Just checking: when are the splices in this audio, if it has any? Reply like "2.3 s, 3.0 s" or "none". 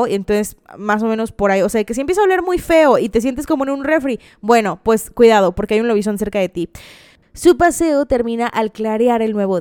none